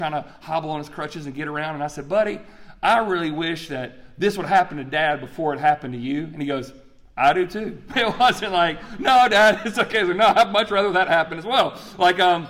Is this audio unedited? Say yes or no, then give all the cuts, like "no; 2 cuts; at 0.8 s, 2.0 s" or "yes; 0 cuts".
no; 1 cut; at 7.9 s